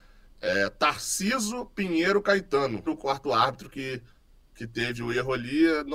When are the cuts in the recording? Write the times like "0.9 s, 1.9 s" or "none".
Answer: 2.9 s